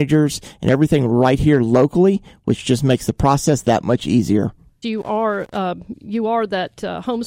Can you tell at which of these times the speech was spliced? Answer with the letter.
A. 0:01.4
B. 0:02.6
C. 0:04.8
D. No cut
C